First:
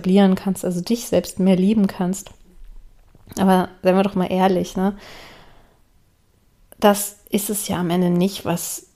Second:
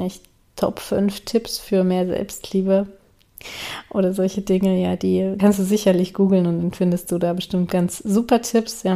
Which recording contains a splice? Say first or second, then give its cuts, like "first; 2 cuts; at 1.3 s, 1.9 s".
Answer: second; 1 cut; at 5.4 s